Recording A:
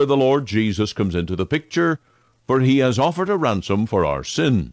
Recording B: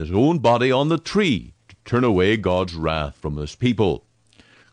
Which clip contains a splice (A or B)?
B